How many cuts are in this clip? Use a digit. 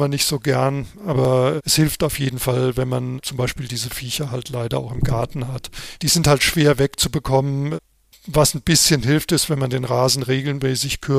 0